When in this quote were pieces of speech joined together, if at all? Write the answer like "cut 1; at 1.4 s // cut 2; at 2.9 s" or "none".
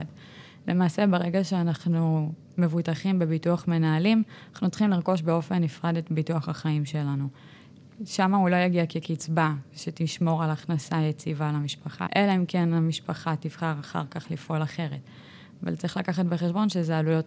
cut 1; at 12.1 s